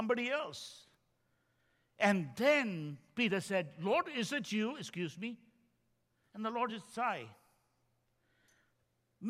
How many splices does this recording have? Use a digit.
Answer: 0